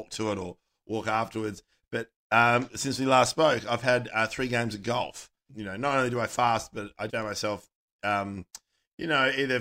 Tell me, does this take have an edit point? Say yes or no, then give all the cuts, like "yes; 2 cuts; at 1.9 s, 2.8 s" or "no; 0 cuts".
yes; 2 cuts; at 5.5 s, 7.1 s